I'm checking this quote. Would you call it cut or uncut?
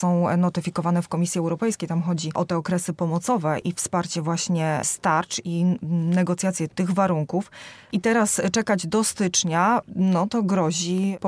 cut